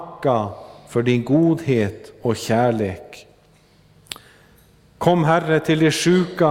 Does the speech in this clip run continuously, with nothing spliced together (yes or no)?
yes